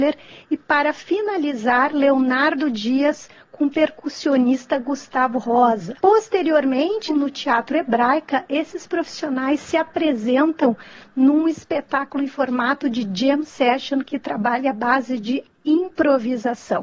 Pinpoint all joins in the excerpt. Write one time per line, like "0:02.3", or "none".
0:06.0
0:07.1